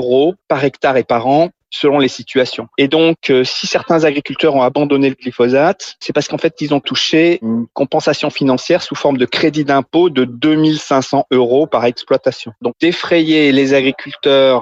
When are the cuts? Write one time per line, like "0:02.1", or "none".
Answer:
none